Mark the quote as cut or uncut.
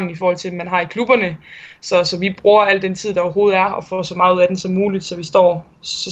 uncut